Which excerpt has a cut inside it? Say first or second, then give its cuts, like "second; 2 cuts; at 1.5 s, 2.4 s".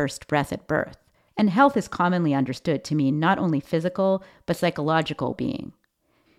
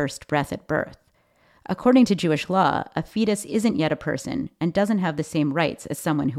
first; 2 cuts; at 1.3 s, 5.3 s